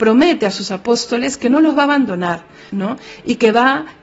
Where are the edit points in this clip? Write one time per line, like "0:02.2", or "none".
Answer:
0:02.7